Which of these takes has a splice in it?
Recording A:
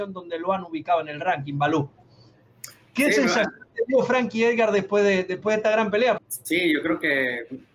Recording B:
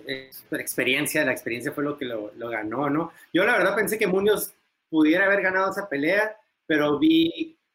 A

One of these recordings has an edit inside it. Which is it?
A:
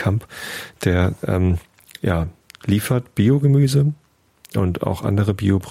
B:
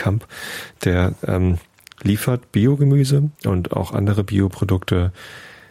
B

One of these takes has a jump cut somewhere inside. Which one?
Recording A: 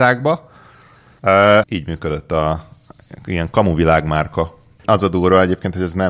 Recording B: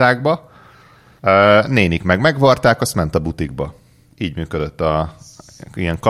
A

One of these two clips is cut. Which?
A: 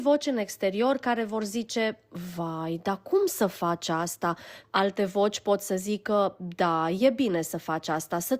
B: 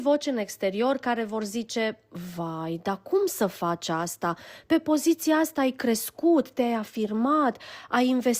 A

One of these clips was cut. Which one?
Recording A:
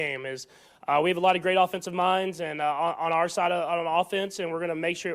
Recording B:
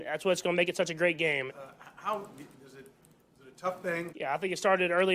B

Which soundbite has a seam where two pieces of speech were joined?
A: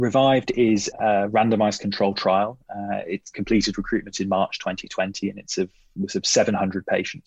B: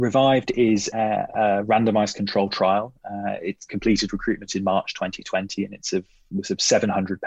A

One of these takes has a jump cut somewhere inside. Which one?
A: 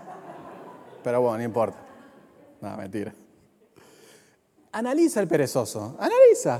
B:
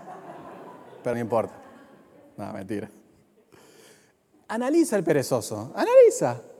B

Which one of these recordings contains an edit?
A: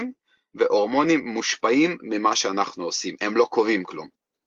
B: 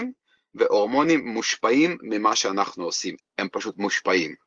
B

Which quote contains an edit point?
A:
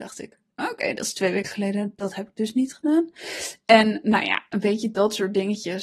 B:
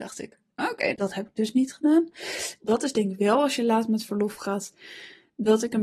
B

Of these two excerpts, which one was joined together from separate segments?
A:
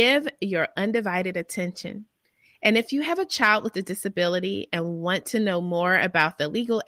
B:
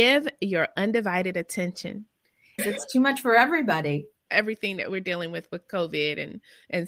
B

